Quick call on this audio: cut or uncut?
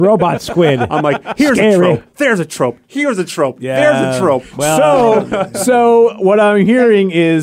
uncut